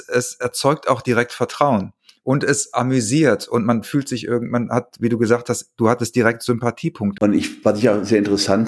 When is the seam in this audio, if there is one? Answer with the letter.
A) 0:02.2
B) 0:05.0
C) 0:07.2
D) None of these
C